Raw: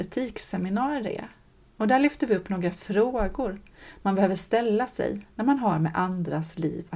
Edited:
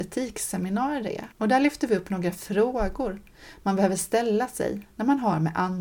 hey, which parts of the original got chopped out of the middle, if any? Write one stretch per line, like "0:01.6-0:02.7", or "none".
0:01.3-0:01.7